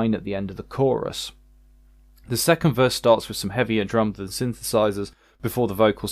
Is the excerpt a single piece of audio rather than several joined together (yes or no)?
yes